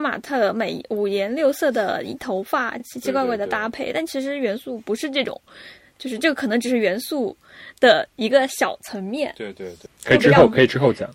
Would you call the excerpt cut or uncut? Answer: uncut